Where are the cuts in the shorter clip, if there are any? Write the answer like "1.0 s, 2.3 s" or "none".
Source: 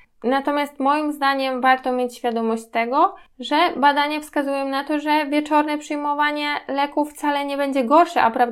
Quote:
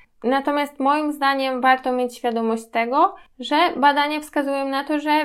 none